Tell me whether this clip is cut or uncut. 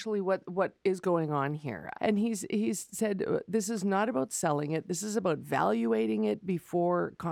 cut